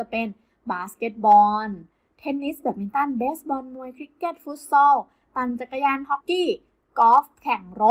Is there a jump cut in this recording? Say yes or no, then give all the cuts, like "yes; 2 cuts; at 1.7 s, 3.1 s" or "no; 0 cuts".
yes; 1 cut; at 6.2 s